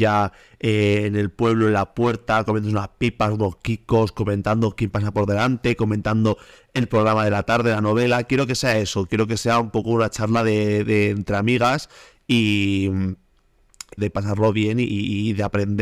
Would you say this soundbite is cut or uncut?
cut